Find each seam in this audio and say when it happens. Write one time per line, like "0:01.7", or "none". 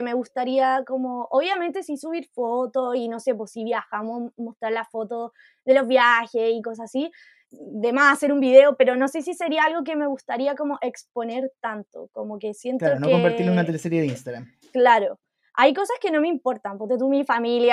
0:07.4